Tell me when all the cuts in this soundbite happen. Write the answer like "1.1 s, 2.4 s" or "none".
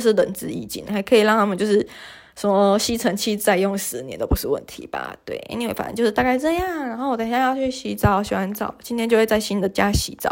none